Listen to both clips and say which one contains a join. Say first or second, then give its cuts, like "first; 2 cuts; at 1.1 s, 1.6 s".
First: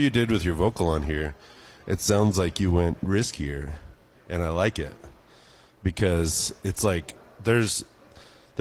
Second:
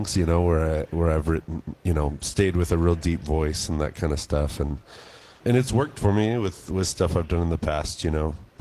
second; 1 cut; at 5.4 s